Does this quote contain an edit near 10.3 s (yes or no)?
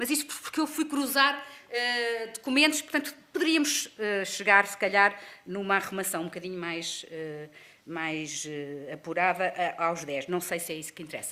no